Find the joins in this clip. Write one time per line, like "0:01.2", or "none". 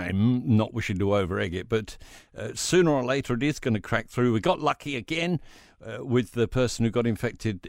none